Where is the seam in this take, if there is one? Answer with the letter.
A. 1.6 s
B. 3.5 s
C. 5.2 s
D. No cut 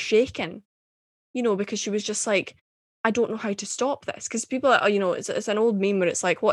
D